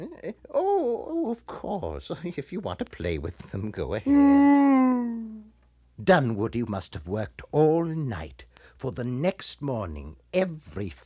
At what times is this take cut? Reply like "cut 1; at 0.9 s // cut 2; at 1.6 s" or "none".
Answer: cut 1; at 6.0 s

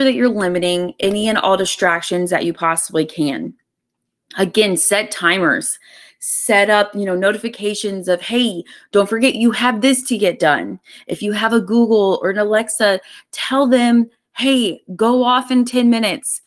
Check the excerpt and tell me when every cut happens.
none

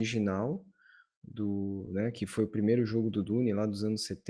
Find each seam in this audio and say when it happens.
none

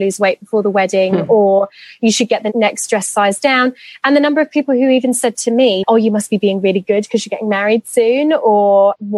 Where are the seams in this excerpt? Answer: cut 1; at 5.8 s

